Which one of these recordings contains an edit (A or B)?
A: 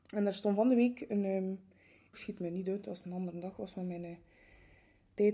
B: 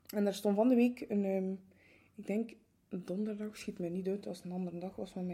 A